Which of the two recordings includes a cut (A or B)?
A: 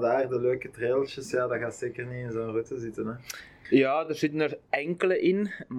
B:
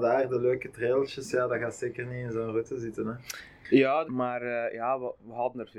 B